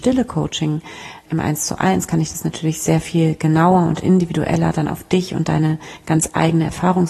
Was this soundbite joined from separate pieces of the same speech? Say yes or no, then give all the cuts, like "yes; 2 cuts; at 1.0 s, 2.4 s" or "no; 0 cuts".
yes; 1 cut; at 1.2 s